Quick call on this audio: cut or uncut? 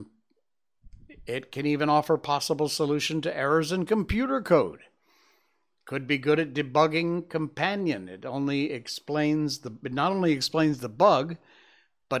uncut